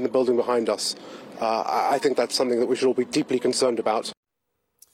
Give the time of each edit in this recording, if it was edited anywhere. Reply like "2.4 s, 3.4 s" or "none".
none

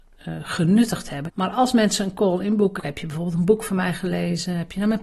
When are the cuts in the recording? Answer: 1.3 s, 2.8 s

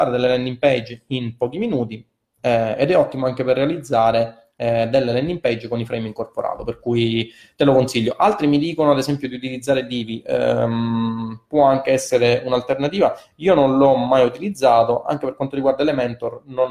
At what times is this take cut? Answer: none

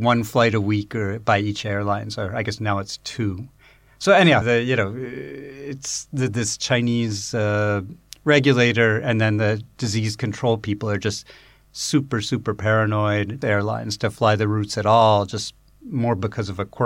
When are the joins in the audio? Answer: 4.4 s, 13.4 s

